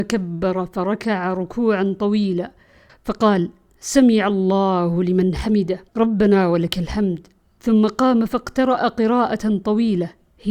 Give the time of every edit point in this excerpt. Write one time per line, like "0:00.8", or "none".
0:02.9
0:05.9